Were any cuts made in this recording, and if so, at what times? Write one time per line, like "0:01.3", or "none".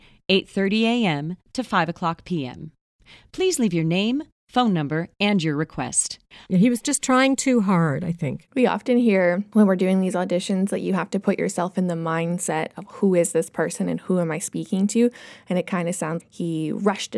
0:06.4
0:16.2